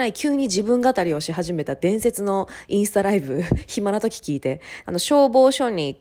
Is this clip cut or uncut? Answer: cut